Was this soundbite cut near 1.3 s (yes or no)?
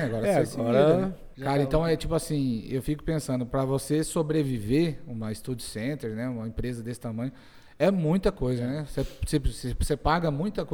yes